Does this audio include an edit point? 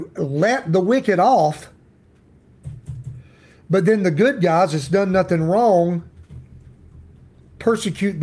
no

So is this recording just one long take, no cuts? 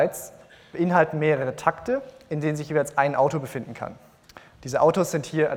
yes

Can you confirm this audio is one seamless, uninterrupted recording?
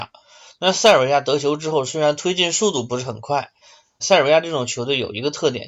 no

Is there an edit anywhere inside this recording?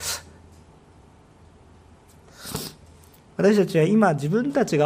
no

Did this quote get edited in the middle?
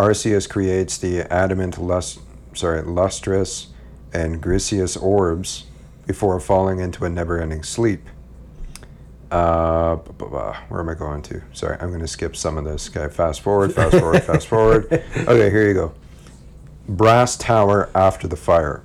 no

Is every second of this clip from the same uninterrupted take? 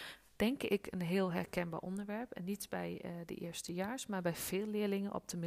yes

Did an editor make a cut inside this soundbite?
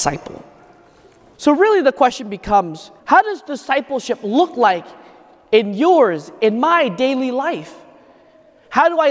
yes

